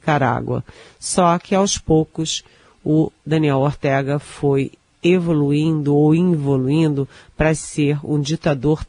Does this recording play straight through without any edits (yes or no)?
yes